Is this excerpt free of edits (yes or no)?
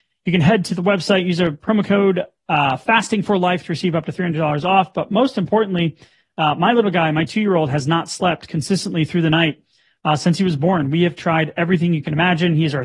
yes